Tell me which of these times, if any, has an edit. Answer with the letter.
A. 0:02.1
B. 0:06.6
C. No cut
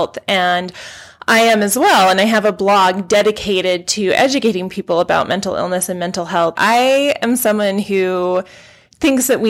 B